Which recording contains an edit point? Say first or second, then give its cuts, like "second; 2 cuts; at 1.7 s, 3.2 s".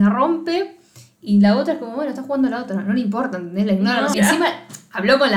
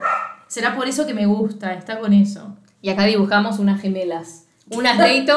first; 1 cut; at 4.1 s